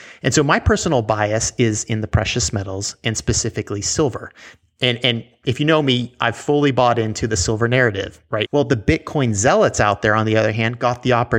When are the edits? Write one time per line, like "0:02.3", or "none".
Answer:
0:08.4